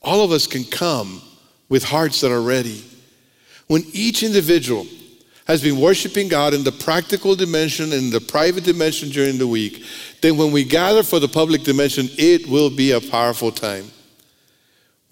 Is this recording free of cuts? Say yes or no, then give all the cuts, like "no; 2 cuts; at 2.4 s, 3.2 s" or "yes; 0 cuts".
yes; 0 cuts